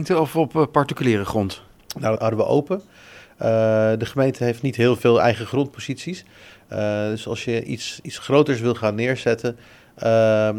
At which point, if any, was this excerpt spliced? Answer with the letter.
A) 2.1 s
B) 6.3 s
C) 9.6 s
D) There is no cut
A